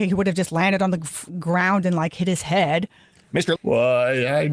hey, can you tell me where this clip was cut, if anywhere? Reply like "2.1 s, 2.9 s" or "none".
3.6 s